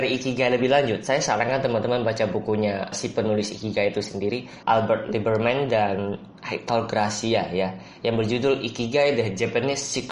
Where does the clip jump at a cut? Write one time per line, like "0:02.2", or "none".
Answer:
0:02.9
0:04.6

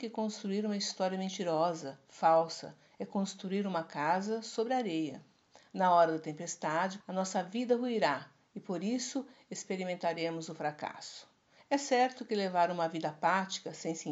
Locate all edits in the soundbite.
0:07.0
0:11.6

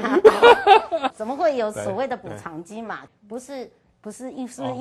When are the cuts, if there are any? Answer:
0:01.1
0:03.1

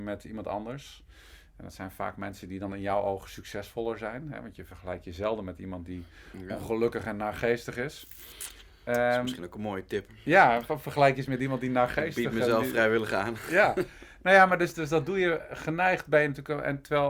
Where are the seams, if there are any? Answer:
0:14.7

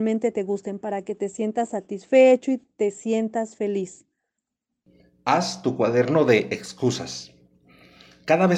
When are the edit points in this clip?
none

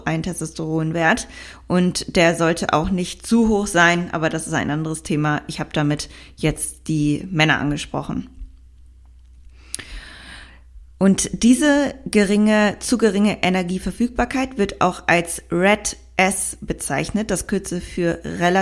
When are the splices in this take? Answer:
none

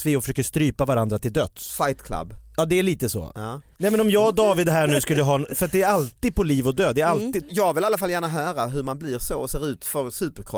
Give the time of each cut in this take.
0:03.7
0:07.4

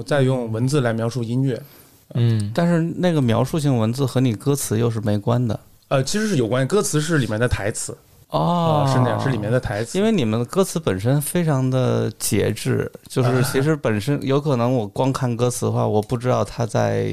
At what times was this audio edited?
none

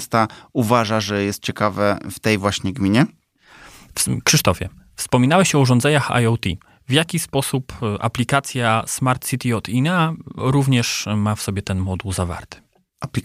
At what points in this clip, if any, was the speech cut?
none

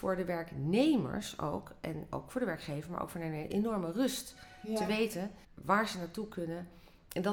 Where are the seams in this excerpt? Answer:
0:05.4

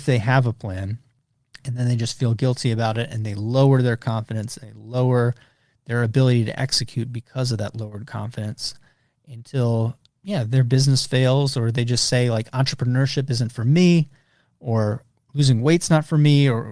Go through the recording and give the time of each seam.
none

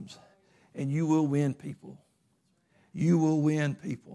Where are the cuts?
none

